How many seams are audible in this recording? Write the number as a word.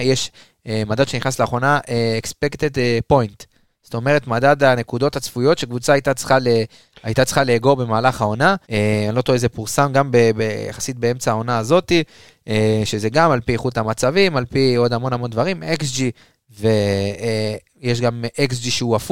one